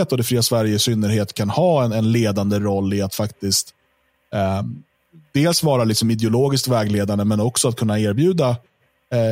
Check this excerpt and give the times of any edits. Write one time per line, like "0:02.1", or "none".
none